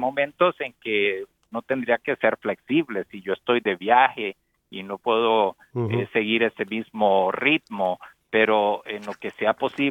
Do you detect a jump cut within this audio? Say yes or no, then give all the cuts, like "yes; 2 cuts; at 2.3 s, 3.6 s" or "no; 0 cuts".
no; 0 cuts